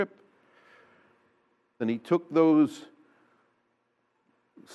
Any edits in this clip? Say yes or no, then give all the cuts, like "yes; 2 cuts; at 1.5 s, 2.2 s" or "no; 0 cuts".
yes; 1 cut; at 1.8 s